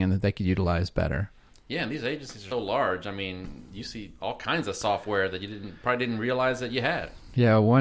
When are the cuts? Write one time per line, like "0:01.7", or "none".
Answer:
0:02.5